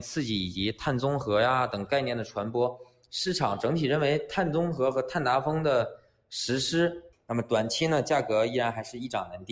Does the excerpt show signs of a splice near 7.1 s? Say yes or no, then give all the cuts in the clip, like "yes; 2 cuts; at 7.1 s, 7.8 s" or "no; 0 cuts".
yes; 1 cut; at 7.1 s